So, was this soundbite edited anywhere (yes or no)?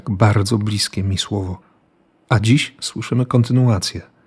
no